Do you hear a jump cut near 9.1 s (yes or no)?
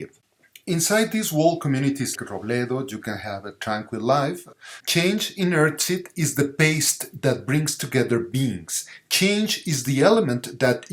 no